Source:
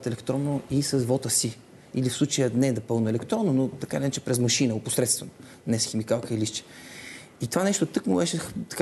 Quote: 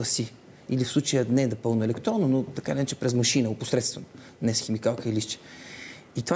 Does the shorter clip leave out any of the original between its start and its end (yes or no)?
no